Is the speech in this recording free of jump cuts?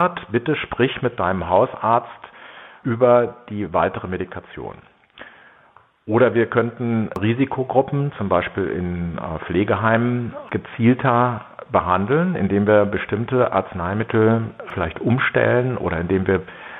yes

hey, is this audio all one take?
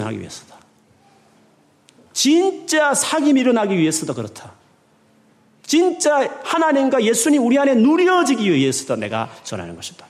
yes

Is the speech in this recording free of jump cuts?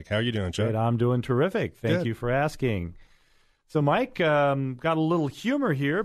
yes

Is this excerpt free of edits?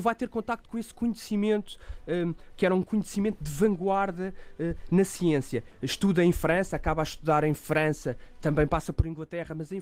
no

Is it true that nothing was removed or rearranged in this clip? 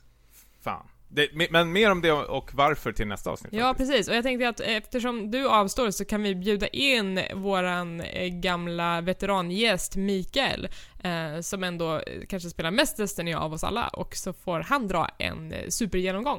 yes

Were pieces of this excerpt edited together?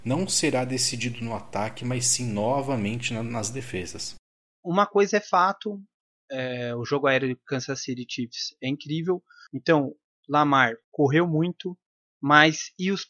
yes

